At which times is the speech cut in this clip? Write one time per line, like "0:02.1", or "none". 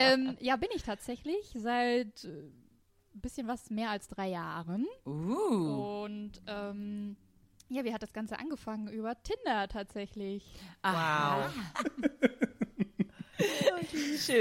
0:11.7